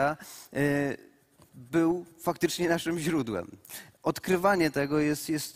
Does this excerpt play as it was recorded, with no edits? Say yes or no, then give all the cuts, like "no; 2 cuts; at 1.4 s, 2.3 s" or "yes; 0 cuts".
yes; 0 cuts